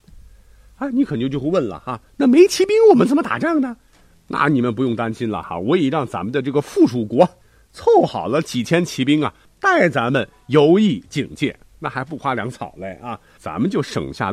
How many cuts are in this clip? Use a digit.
0